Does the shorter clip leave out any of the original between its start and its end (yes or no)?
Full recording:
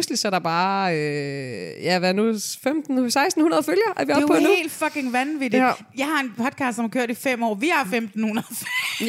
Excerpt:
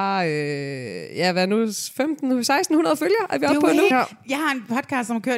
yes